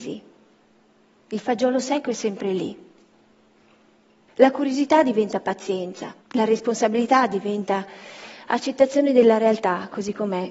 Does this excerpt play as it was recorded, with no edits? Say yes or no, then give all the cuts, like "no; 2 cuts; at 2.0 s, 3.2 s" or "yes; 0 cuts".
no; 2 cuts; at 4.3 s, 6.2 s